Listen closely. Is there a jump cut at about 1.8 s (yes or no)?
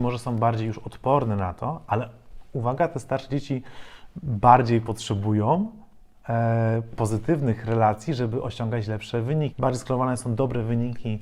no